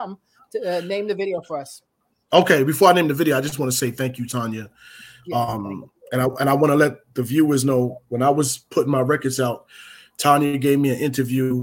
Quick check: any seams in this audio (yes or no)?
no